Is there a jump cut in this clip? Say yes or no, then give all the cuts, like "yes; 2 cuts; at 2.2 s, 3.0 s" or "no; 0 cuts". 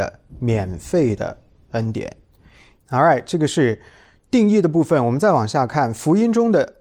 yes; 1 cut; at 2.8 s